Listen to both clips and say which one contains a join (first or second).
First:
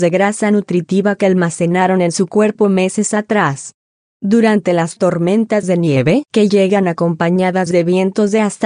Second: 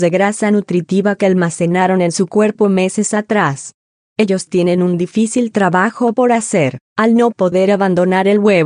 second